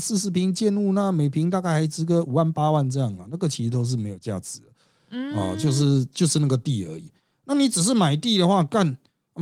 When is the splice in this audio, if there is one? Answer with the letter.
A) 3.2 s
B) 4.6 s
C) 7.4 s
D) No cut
D